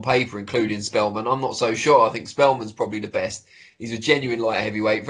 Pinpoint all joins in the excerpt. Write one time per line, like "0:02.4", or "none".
none